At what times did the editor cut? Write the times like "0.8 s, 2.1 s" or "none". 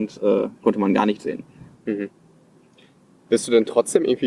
1.8 s

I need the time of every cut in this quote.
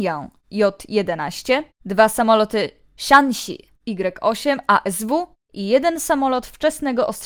1.7 s

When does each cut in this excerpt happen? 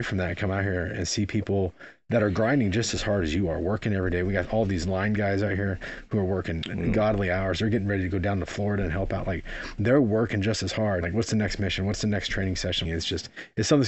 11.0 s, 12.8 s

